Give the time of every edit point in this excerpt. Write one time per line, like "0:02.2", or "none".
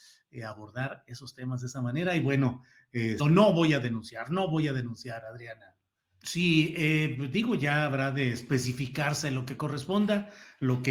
0:03.2
0:06.1